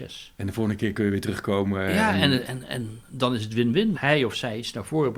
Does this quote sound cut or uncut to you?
cut